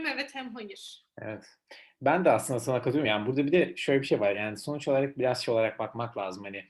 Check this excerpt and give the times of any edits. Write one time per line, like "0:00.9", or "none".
none

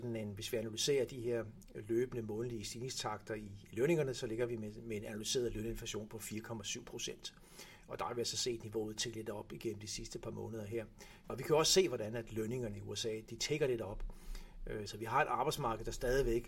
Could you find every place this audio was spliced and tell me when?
0:11.3
0:13.3
0:14.9

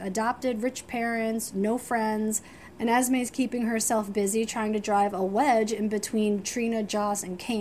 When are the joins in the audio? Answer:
0:02.7

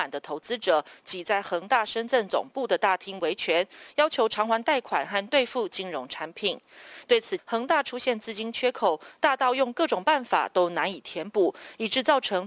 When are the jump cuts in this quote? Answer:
0:07.4

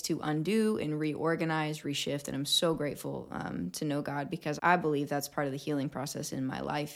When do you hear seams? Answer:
0:01.8
0:04.6

